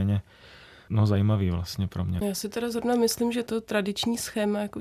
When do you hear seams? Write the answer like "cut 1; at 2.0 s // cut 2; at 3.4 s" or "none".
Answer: cut 1; at 2.2 s